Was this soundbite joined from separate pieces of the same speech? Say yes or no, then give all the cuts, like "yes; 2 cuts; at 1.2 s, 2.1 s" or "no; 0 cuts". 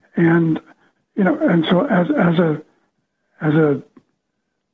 no; 0 cuts